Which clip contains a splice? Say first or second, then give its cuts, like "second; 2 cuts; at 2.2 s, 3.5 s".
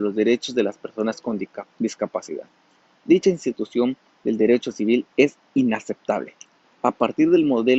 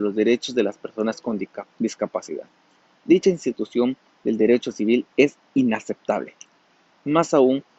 first; 1 cut; at 6.6 s